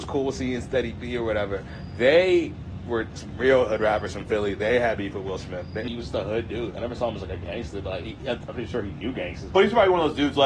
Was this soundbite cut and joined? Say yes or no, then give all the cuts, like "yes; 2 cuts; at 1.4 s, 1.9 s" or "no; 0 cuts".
yes; 2 cuts; at 5.9 s, 9.5 s